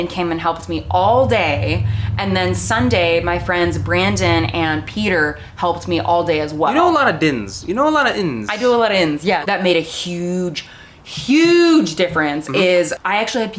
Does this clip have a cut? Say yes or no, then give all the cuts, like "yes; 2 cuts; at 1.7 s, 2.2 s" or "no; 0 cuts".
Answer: yes; 1 cut; at 9.4 s